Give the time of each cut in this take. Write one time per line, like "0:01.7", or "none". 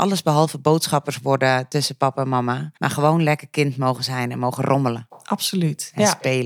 0:02.8